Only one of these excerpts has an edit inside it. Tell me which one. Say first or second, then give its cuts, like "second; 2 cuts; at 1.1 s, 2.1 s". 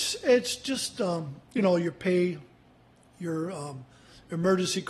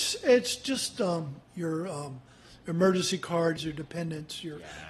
second; 2 cuts; at 1.4 s, 3.6 s